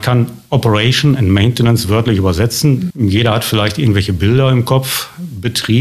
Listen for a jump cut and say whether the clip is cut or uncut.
cut